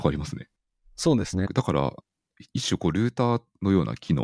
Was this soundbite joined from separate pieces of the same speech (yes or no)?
yes